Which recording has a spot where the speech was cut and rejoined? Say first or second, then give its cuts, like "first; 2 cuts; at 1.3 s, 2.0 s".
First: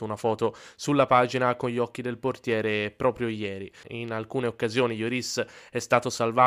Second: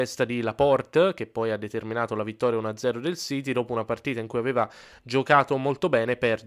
first; 1 cut; at 3.8 s